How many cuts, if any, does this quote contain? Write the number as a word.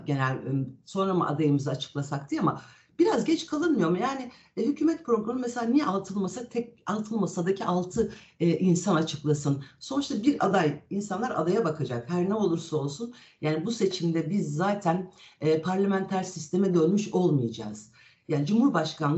zero